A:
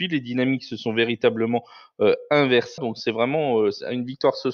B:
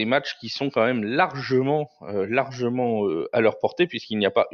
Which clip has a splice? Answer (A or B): A